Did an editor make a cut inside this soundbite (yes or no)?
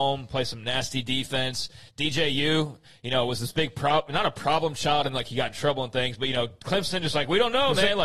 no